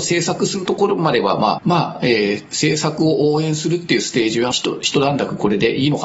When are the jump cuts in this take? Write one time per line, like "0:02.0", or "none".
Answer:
0:01.6
0:04.5